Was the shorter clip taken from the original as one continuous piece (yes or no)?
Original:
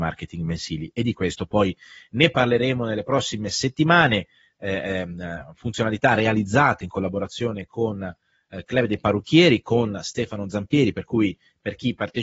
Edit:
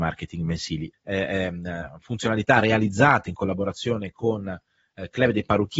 no